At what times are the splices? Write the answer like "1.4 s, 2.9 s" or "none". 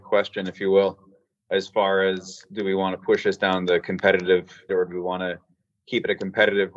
1.4 s, 4.7 s